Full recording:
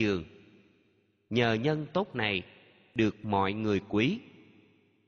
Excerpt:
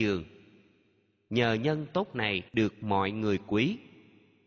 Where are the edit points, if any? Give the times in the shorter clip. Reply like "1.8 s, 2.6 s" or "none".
2.5 s